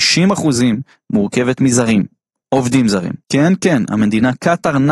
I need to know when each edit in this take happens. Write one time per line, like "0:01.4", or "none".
0:03.2